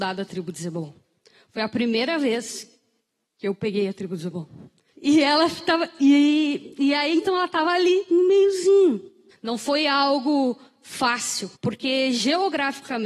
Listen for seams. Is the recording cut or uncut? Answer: cut